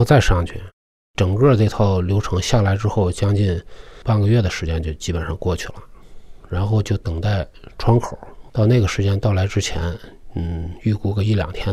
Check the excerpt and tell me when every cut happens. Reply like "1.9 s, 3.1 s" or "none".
8.5 s